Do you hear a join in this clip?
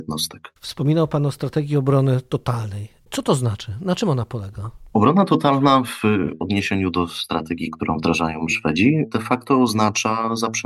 no; 0 cuts

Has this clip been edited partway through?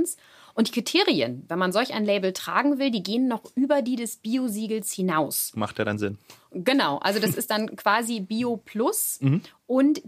no; 0 cuts

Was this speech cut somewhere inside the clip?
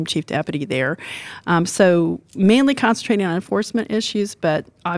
no; 0 cuts

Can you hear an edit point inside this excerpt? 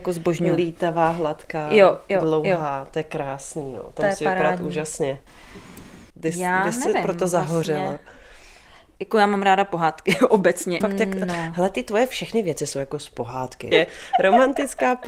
yes; 3 cuts; at 6.1 s, 10.8 s, 13.7 s

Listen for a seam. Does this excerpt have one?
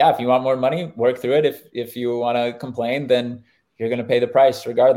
no; 0 cuts

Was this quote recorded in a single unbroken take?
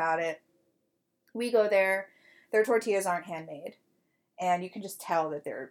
yes; 0 cuts

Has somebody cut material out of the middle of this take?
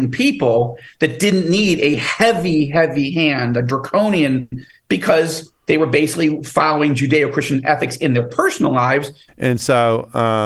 yes; 2 cuts; at 4.7 s, 9.3 s

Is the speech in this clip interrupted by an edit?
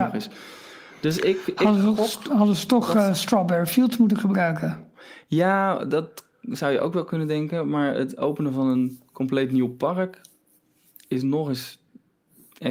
no; 0 cuts

